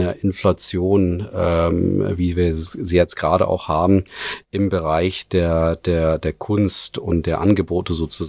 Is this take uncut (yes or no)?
yes